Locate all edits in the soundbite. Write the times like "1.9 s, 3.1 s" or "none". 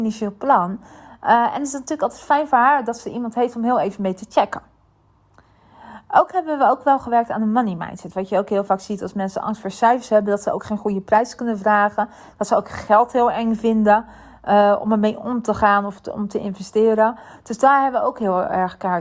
none